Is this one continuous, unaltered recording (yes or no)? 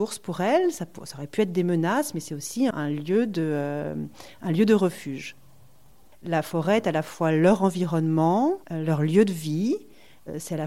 no